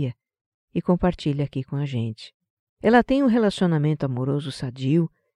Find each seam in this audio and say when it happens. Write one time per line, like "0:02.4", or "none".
0:02.7